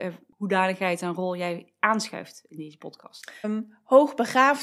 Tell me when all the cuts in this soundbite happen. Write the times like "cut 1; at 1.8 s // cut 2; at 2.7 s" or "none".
cut 1; at 3.4 s

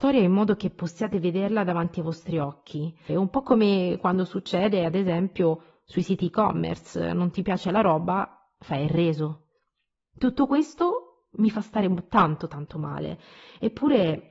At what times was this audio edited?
cut 1; at 3.1 s

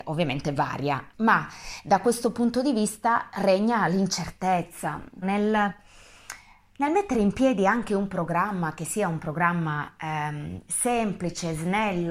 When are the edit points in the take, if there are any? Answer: cut 1; at 1.1 s // cut 2; at 5.2 s

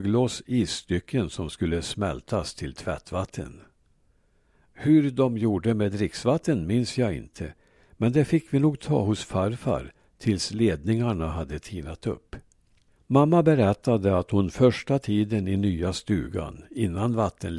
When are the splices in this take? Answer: cut 1; at 12.9 s

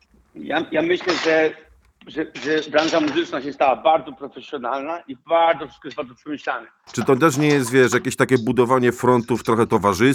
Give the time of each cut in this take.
cut 1; at 6.9 s

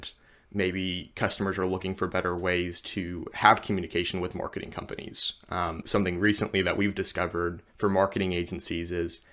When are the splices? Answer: cut 1; at 5.8 s // cut 2; at 7.7 s

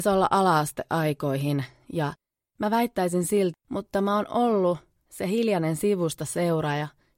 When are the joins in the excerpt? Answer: cut 1; at 3.5 s

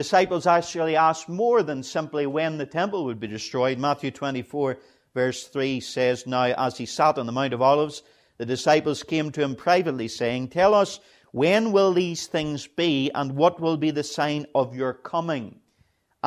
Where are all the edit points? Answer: none

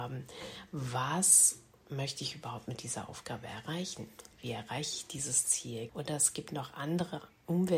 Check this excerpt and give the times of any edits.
cut 1; at 5.9 s

